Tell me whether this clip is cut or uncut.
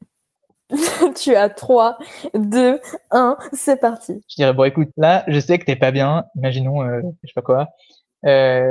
cut